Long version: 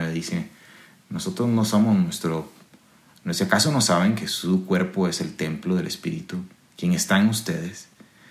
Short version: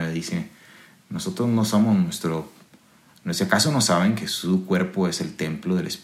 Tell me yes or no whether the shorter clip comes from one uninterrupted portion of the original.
yes